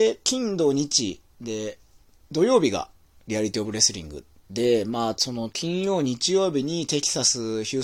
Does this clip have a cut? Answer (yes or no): no